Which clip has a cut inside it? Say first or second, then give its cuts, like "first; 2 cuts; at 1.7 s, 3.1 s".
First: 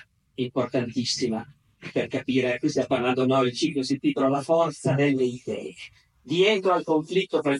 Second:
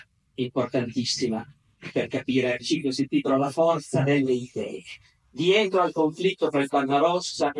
second; 1 cut; at 2.6 s